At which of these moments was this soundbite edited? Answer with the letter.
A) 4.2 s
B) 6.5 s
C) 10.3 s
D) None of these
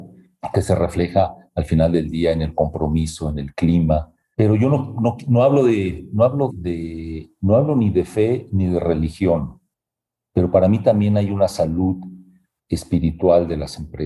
B